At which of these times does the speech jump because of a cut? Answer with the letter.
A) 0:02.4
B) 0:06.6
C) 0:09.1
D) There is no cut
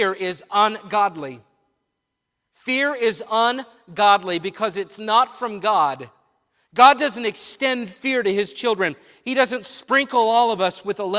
D